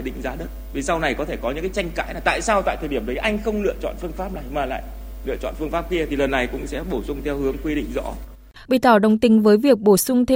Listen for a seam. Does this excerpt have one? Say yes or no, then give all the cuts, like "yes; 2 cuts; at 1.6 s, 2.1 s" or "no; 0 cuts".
yes; 1 cut; at 8.7 s